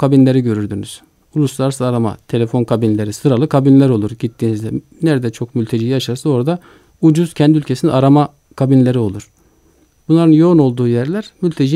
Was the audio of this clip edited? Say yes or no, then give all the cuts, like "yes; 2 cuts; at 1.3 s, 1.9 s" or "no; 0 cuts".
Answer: no; 0 cuts